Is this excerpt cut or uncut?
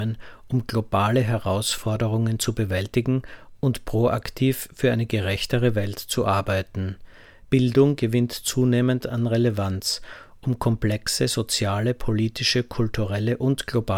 uncut